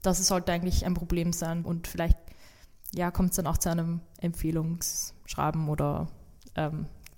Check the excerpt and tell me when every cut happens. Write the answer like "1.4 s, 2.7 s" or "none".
1.6 s